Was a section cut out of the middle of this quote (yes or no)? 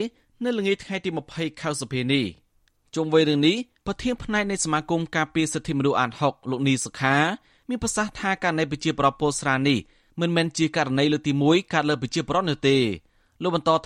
no